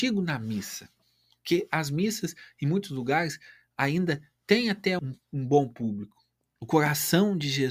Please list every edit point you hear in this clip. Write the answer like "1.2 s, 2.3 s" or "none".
5.0 s, 6.4 s